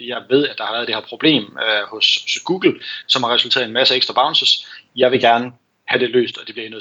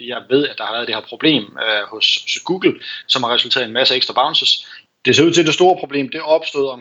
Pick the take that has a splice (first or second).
second